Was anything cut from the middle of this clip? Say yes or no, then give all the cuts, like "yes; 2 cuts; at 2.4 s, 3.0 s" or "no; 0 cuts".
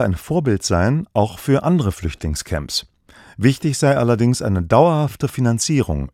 no; 0 cuts